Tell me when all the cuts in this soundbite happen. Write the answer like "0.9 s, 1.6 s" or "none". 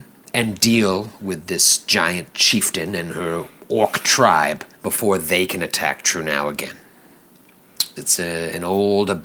4.8 s, 8.0 s